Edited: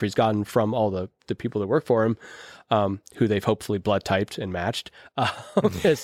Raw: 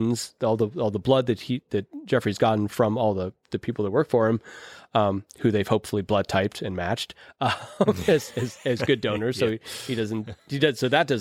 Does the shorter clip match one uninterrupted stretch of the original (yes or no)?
yes